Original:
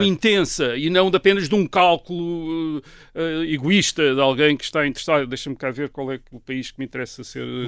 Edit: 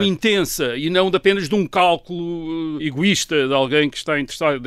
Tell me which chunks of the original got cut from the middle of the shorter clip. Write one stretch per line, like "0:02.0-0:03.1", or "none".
0:02.8-0:03.5